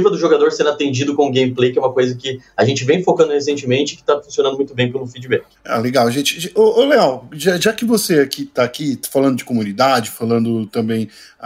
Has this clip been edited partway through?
no; 0 cuts

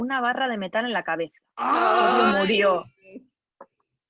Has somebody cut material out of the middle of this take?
no; 0 cuts

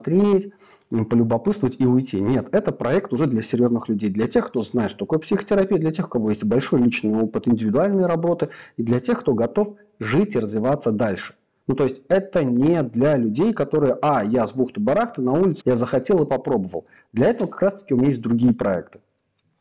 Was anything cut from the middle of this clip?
yes; 1 cut; at 15.6 s

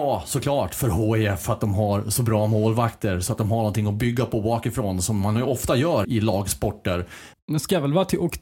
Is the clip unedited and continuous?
no; 2 cuts; at 6.0 s, 7.3 s

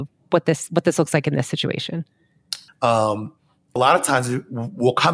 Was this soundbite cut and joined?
yes; 2 cuts; at 2.7 s, 3.8 s

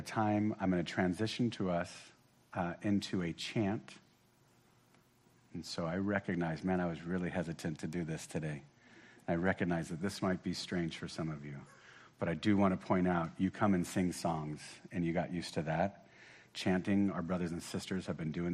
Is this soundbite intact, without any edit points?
yes; 0 cuts

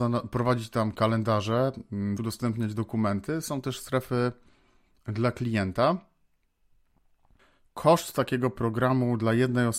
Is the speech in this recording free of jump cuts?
no; 1 cut; at 2.2 s

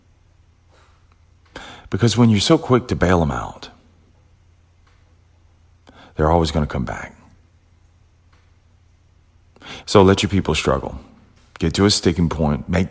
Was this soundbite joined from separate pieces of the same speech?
yes; 1 cut; at 9.8 s

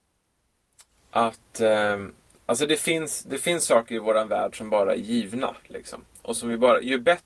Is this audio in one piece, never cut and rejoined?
yes; 0 cuts

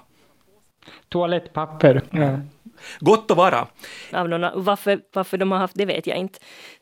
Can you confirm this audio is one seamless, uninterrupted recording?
no; 2 cuts; at 2.1 s, 4.1 s

